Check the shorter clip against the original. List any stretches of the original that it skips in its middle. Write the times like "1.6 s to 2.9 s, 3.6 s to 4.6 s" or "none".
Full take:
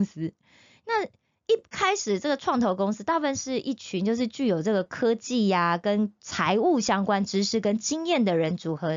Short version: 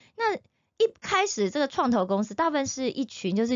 none